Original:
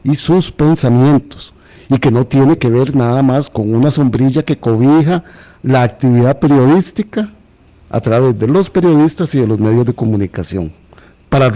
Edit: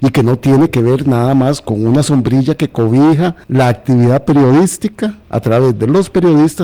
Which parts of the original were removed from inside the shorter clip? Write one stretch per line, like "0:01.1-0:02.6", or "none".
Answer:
0:05.3-0:05.6
0:07.4-0:07.8